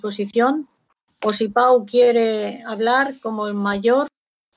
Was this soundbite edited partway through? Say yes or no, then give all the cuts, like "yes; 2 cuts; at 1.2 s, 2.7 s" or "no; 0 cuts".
no; 0 cuts